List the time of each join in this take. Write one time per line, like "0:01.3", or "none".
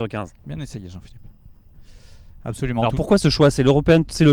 none